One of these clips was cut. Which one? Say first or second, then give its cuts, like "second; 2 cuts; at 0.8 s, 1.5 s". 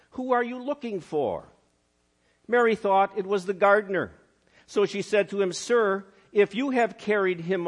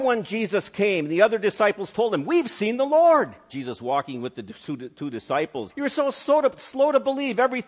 second; 2 cuts; at 3.5 s, 5.7 s